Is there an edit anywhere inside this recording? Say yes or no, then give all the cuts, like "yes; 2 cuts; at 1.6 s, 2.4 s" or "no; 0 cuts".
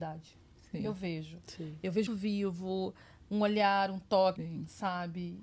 yes; 2 cuts; at 2.1 s, 4.4 s